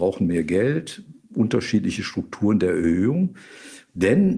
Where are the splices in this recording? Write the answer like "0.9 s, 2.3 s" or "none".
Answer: none